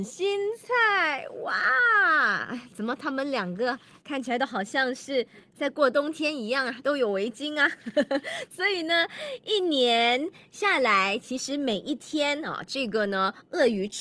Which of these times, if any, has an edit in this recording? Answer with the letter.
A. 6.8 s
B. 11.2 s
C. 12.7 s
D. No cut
D